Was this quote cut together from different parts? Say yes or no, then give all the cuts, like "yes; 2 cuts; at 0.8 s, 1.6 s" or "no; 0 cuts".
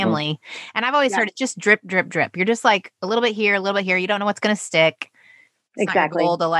no; 0 cuts